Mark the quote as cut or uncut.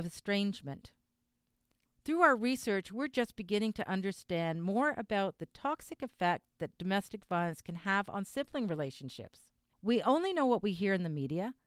cut